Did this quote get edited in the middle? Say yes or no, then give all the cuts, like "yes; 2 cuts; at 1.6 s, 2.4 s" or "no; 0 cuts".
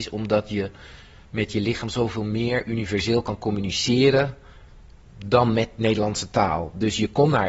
no; 0 cuts